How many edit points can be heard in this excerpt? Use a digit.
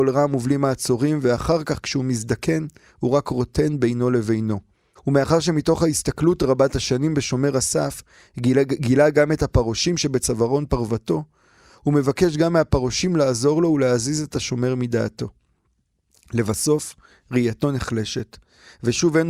1